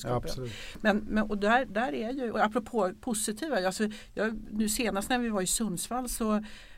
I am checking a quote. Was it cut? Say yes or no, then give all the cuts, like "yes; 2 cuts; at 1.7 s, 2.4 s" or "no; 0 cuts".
no; 0 cuts